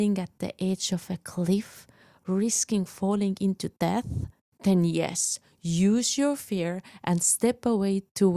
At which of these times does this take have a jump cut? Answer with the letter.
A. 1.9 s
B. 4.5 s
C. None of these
C